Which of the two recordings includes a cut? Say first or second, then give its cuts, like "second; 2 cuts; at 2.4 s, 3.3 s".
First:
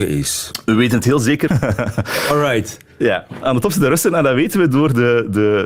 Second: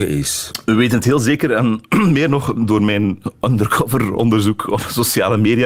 first; 1 cut; at 1.5 s